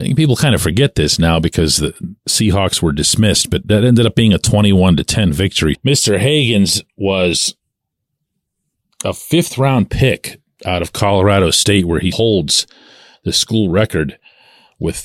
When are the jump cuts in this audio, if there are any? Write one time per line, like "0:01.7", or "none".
0:05.7
0:12.1